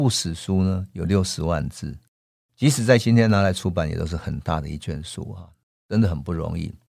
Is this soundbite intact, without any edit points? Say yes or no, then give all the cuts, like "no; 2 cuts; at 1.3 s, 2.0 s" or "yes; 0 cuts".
yes; 0 cuts